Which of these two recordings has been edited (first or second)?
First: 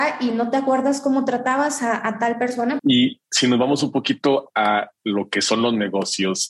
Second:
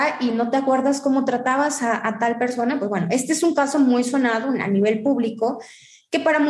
first